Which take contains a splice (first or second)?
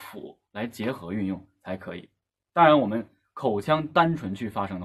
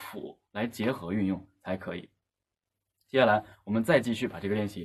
first